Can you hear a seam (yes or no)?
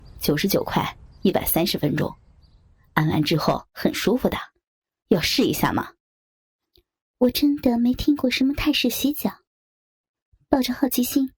no